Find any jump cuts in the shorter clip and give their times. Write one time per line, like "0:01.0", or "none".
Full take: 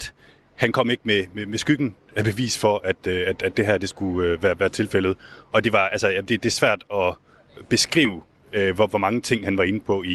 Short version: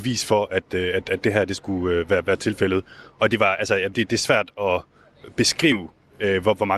none